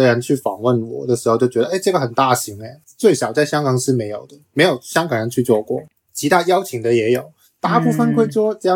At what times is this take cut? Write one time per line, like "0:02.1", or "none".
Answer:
0:07.4